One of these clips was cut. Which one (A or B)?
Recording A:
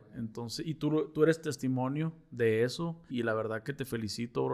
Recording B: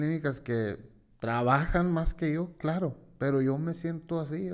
A